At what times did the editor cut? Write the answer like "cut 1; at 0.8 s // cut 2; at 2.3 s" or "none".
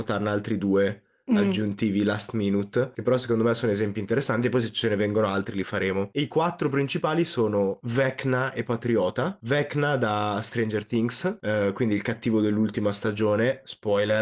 none